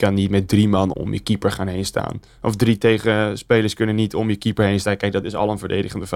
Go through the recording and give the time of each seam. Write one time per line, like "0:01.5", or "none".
0:00.9